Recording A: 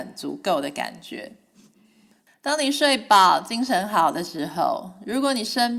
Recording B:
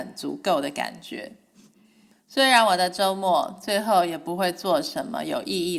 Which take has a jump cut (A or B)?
A